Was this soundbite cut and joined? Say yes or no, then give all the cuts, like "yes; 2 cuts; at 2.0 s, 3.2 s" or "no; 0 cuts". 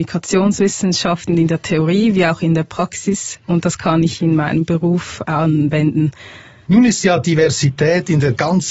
yes; 1 cut; at 6.7 s